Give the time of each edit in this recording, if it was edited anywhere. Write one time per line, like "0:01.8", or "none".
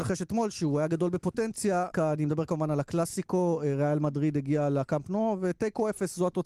0:01.9